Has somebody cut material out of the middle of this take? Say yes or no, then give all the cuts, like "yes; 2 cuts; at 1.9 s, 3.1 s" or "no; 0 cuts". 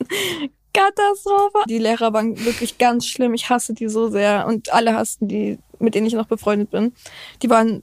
yes; 1 cut; at 1.7 s